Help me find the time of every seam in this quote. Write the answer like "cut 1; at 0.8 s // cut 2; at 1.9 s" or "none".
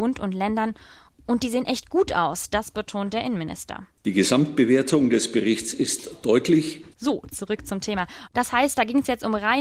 cut 1; at 6.9 s // cut 2; at 8.3 s